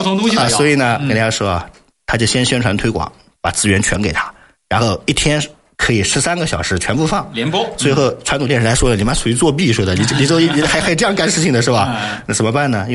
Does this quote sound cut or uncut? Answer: uncut